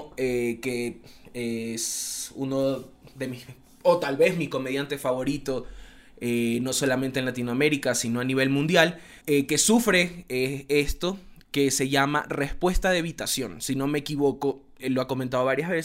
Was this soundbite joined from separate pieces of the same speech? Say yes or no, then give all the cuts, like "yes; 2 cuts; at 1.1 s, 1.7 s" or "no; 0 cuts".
yes; 2 cuts; at 9.2 s, 14.8 s